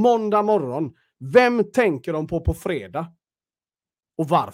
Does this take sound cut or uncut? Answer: uncut